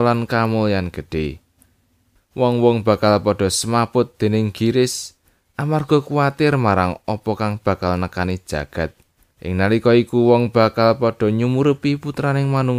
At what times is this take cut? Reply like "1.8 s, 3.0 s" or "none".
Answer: 2.2 s, 9.3 s